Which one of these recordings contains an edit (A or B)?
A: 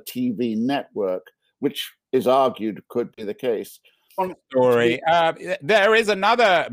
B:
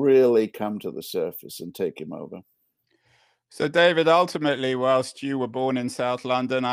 A